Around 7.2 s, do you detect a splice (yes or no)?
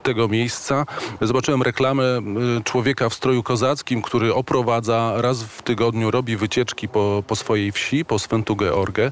no